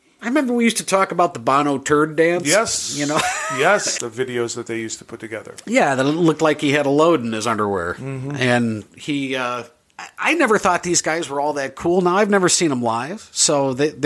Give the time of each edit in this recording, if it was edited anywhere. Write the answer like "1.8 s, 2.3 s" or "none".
3.9 s